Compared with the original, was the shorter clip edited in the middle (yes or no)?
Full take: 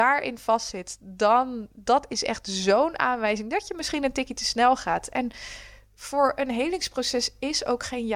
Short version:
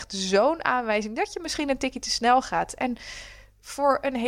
no